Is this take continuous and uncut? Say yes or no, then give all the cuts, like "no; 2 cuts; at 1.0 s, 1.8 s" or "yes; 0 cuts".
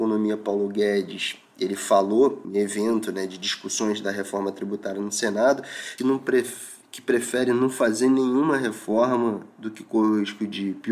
no; 2 cuts; at 2.4 s, 6.0 s